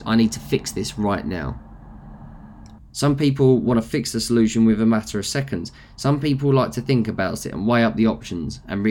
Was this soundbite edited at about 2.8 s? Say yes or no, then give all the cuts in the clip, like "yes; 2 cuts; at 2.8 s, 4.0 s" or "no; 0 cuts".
yes; 1 cut; at 2.8 s